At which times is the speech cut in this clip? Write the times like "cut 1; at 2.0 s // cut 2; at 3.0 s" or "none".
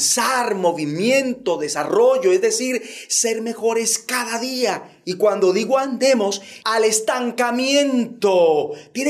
cut 1; at 5.0 s // cut 2; at 6.6 s